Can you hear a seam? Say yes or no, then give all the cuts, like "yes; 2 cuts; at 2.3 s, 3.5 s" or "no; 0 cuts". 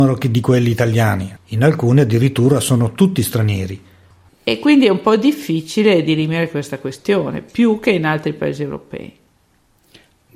yes; 2 cuts; at 1.4 s, 4.3 s